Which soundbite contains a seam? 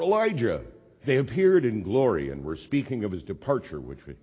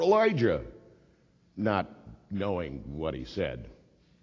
first; 1 cut; at 1.0 s

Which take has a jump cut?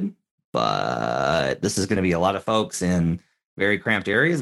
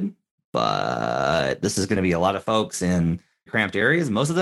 second; 1 cut; at 3.5 s

